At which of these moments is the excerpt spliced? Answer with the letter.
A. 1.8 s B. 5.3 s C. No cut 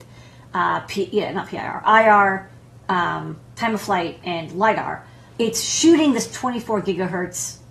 B